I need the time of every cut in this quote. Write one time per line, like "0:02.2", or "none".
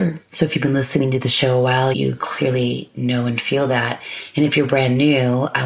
0:01.9

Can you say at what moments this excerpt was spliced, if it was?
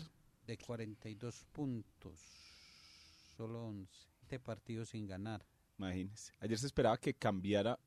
0:04.2

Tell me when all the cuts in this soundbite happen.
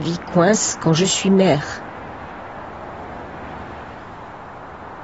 none

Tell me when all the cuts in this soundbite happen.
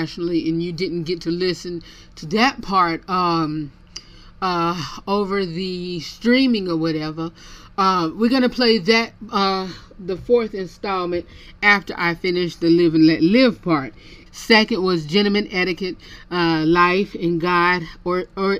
0:14.3

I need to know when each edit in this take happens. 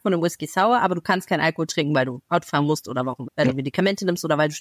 0:03.3

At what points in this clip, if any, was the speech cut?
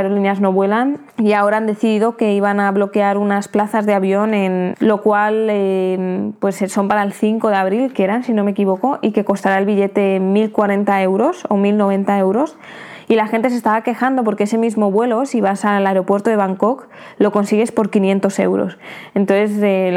0:01.1
0:04.7
0:07.9

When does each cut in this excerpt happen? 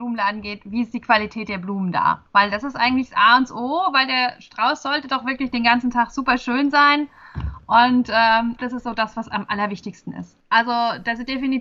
0:02.3
0:08.6
0:10.4

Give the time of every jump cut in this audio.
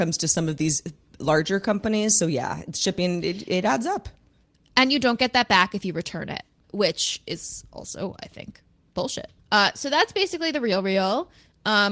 0:09.4

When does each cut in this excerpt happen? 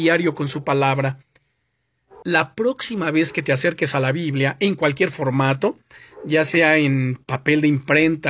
0:02.2

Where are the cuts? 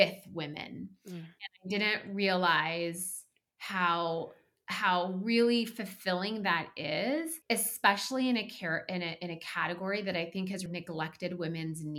0:07.4
0:10.7

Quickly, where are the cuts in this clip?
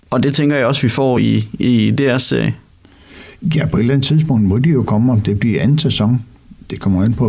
none

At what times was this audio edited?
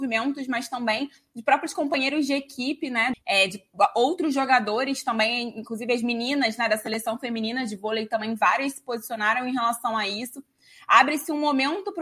0:03.1

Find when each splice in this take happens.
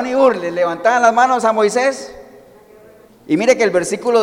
0:03.1

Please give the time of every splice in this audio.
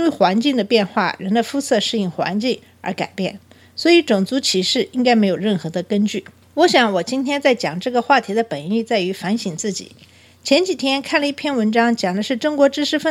none

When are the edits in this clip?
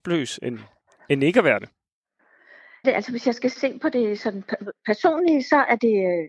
0:02.8

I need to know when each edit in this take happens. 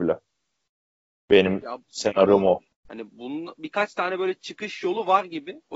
0:02.7

